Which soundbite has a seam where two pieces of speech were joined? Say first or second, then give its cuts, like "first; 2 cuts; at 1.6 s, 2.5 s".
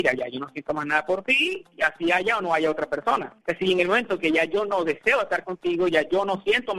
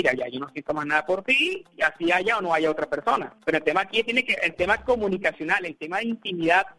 first; 1 cut; at 3.4 s